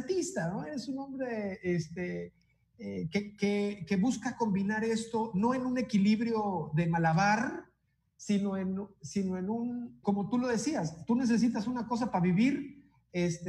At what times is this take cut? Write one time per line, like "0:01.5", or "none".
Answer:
0:10.0